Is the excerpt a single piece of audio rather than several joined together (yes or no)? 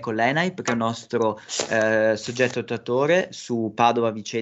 yes